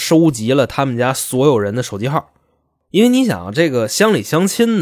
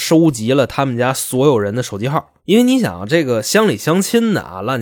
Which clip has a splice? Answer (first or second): second